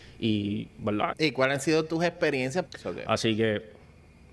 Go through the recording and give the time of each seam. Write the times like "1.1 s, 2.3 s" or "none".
1.1 s, 2.7 s